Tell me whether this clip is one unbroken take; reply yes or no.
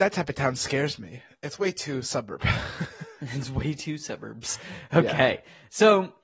yes